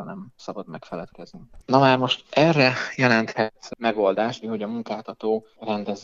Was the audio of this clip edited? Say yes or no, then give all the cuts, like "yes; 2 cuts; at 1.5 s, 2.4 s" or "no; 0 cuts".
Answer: yes; 2 cuts; at 1.6 s, 4.4 s